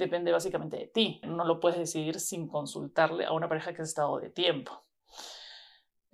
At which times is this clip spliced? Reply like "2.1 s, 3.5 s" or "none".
1.2 s